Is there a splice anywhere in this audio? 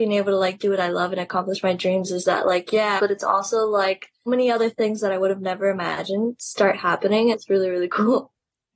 yes; 3 cuts; at 3.0 s, 4.3 s, 7.3 s

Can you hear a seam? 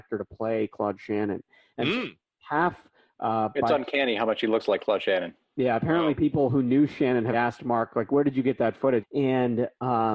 yes; 2 cuts; at 7.3 s, 9.0 s

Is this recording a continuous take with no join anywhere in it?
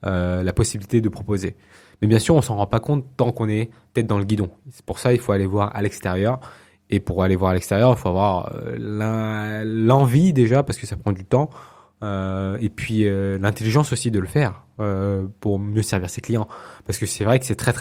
yes; 0 cuts

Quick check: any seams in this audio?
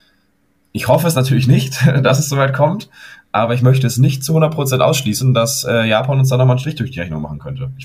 no; 0 cuts

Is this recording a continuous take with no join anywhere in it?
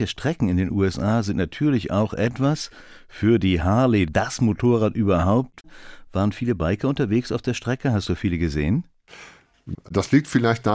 no; 2 cuts; at 4.1 s, 9.7 s

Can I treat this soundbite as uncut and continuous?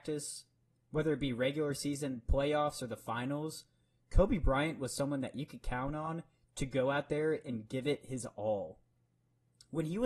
yes; 0 cuts

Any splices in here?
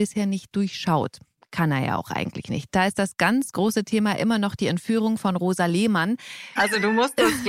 yes; 2 cuts; at 2.7 s, 6.6 s

